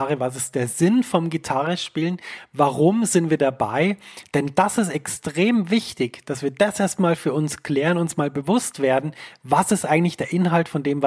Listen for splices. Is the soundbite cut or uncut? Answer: uncut